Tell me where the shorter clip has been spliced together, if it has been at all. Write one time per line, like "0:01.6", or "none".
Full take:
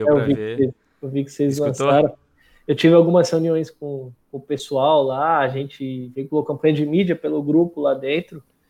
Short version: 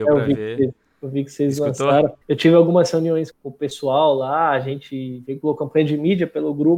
0:02.2
0:03.3